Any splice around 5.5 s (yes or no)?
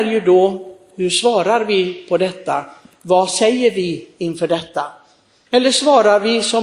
yes